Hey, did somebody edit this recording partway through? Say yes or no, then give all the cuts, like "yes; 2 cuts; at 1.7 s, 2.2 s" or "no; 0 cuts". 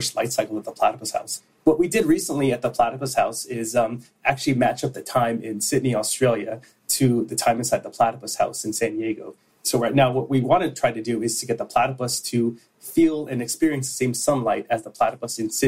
no; 0 cuts